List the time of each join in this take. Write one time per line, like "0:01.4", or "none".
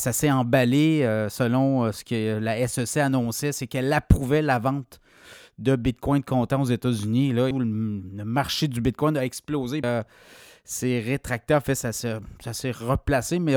0:07.5
0:09.8